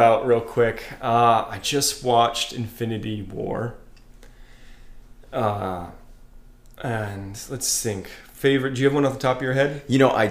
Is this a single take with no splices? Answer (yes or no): yes